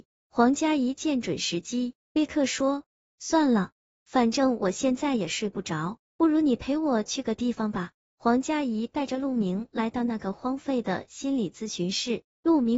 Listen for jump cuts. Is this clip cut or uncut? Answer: uncut